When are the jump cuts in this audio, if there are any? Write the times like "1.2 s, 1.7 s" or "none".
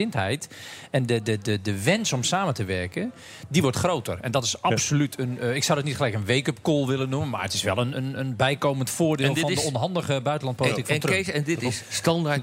7.9 s